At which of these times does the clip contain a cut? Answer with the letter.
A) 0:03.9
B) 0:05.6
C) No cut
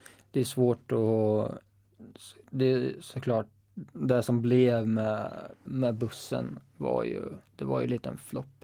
B